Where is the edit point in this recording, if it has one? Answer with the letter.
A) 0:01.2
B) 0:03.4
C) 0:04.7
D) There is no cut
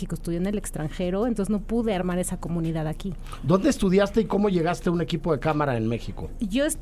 D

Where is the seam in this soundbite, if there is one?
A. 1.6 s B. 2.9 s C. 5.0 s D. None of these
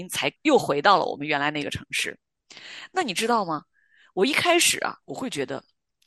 C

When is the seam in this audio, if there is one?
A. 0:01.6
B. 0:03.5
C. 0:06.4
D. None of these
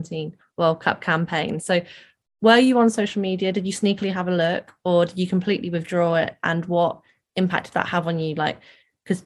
D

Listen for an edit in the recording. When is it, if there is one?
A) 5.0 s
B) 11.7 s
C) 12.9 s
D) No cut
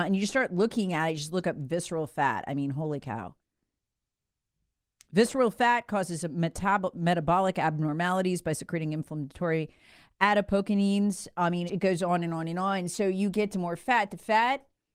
B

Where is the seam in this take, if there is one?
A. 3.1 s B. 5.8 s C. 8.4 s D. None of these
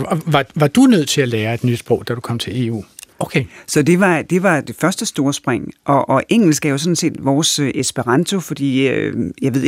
A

